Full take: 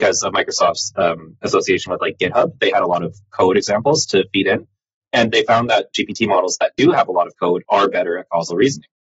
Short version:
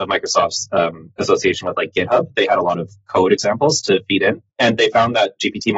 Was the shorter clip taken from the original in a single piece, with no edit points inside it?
no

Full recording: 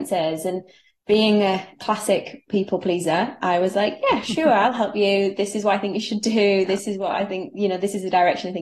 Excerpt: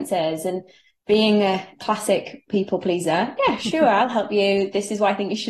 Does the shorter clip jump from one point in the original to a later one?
yes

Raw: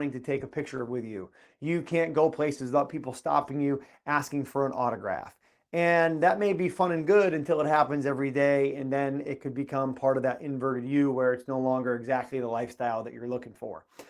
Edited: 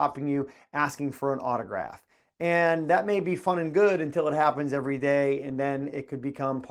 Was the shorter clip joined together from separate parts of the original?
no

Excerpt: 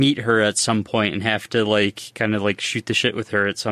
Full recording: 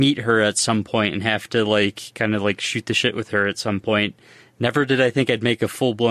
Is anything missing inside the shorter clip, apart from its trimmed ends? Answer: no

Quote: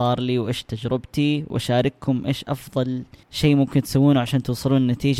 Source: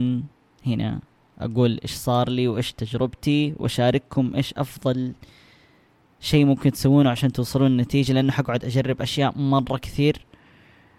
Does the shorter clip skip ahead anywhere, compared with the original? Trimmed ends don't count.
yes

